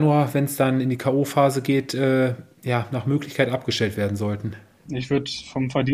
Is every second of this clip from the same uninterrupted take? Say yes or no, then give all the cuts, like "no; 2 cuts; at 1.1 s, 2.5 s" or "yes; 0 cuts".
no; 1 cut; at 4.9 s